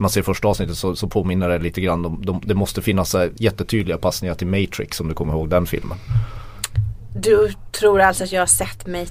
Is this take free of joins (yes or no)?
yes